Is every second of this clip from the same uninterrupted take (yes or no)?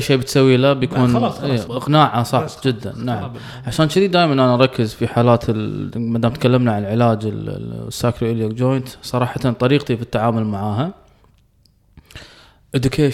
no